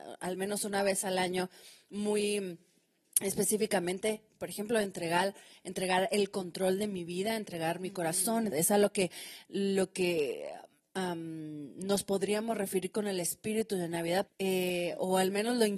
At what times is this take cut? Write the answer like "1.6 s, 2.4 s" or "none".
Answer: 8.5 s, 14.3 s

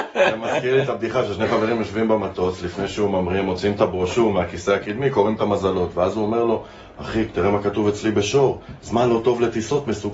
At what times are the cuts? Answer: none

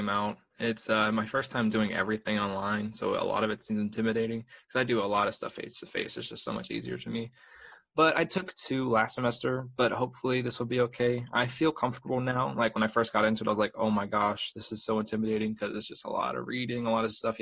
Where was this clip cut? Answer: none

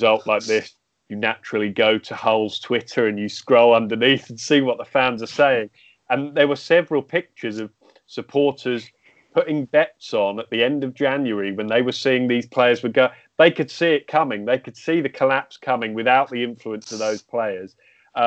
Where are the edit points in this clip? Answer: none

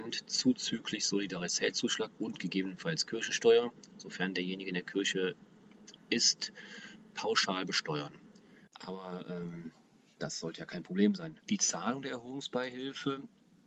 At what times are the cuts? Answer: 8.7 s, 11.4 s

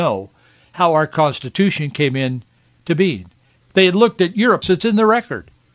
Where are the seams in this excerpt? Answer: 3.6 s, 4.6 s

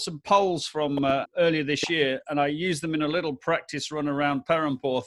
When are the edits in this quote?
1.2 s

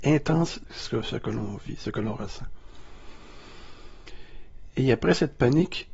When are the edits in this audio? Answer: none

